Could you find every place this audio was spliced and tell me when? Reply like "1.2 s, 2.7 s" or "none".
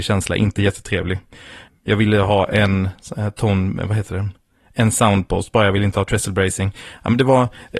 1.7 s